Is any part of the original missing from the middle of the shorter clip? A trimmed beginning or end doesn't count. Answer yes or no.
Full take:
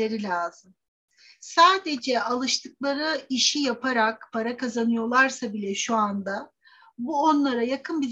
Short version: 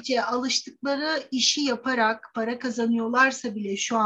no